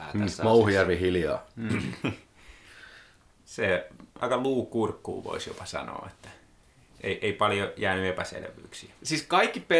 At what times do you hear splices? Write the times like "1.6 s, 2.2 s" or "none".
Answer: 4.2 s